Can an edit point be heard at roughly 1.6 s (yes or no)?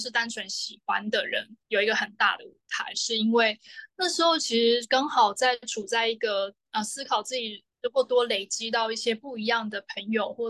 yes